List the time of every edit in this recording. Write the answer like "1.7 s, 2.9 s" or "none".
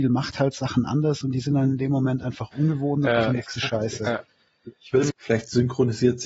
5.1 s